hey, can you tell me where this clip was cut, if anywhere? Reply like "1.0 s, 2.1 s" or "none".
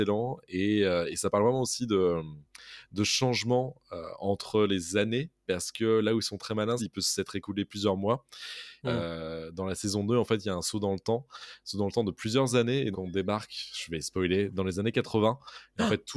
6.8 s, 8.8 s, 12.9 s

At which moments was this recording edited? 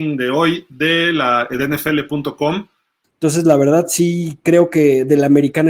3.0 s

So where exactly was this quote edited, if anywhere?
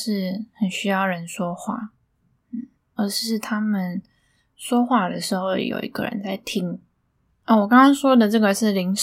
3.0 s, 7.3 s

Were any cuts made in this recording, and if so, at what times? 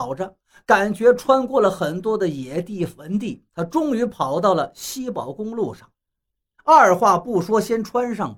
6.6 s

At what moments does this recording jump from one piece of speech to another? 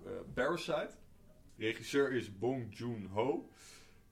1.6 s

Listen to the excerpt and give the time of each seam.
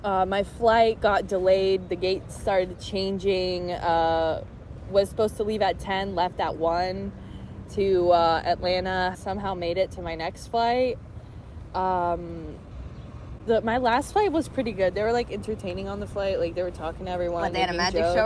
9.1 s

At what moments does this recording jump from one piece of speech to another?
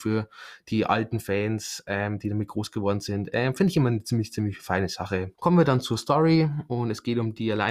5.3 s

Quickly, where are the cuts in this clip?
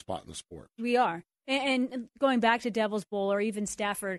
none

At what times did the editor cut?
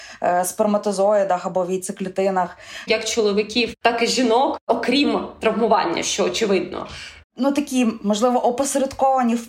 2.9 s, 7.2 s

